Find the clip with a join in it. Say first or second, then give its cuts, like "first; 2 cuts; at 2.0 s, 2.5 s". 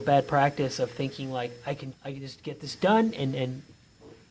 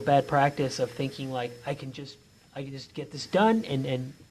first; 1 cut; at 1.9 s